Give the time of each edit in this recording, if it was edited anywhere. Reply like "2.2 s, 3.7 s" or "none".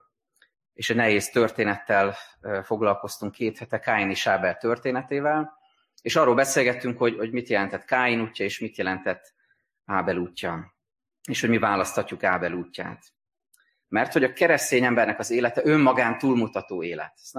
13.8 s